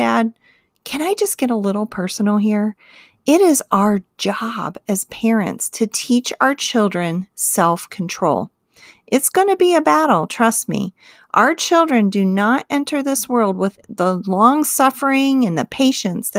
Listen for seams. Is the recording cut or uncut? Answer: uncut